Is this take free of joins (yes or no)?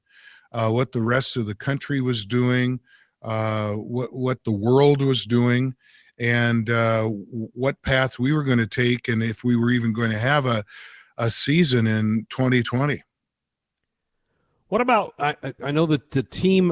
yes